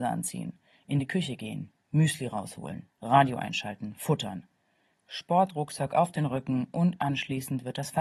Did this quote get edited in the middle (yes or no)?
yes